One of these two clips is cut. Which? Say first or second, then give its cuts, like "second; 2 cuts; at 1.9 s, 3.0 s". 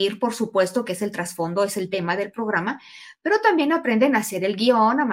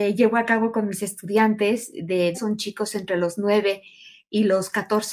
second; 1 cut; at 2.3 s